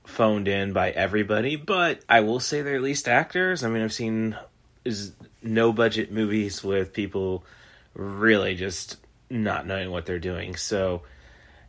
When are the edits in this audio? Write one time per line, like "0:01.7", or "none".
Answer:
0:02.0